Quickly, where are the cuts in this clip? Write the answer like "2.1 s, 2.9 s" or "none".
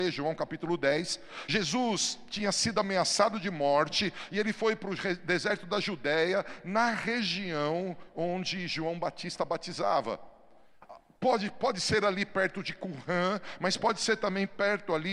none